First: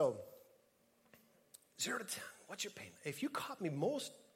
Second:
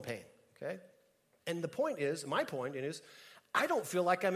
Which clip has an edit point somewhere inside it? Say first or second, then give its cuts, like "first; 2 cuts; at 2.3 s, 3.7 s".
second; 1 cut; at 1.4 s